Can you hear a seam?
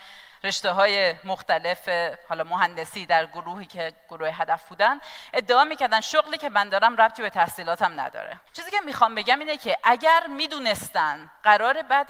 yes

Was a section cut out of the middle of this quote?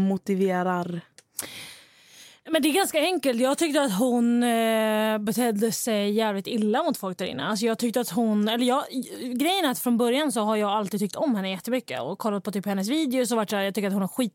no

